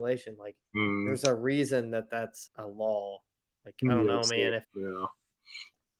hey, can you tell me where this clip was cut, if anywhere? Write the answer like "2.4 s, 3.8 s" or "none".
2.5 s, 4.6 s

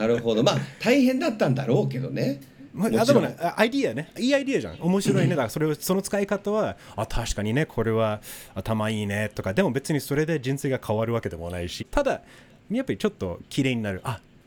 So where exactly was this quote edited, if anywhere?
11.8 s

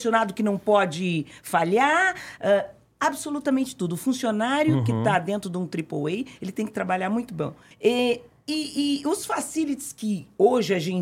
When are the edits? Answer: 6.4 s, 7.7 s

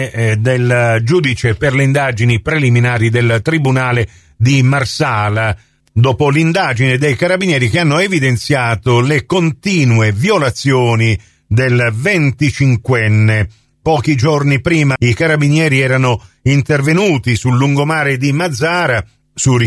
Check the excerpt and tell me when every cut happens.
15.0 s

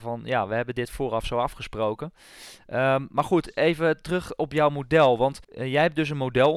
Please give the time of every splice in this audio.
5.4 s

